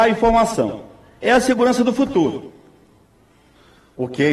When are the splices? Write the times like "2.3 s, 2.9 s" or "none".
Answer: none